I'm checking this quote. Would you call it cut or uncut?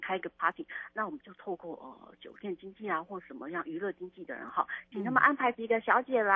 cut